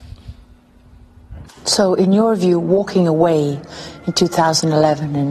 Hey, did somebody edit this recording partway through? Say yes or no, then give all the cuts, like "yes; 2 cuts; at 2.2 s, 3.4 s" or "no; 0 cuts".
yes; 1 cut; at 1.5 s